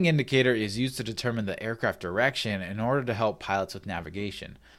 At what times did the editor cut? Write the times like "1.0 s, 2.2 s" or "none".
none